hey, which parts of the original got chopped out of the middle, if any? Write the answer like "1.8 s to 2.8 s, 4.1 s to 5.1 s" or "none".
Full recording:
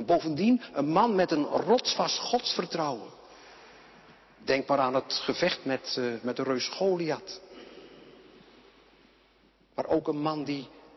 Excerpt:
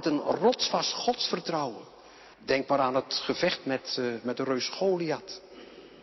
3.6 s to 4.3 s